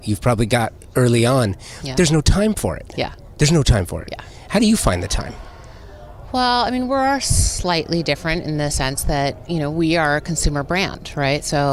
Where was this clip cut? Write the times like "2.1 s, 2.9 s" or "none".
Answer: none